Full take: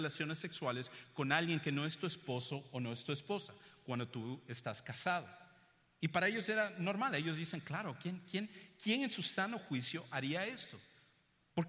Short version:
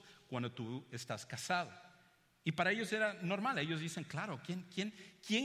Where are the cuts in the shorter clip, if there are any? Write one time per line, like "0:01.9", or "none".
none